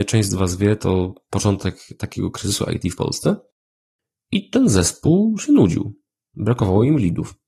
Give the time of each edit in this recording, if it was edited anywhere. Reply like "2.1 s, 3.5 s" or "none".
none